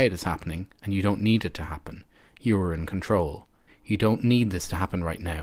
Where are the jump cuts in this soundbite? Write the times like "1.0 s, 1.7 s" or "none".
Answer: 3.7 s